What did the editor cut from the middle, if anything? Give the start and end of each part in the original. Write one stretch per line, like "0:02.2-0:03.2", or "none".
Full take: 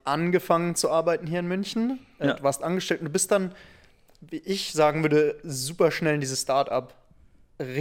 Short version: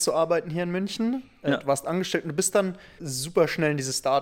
0:03.7-0:05.4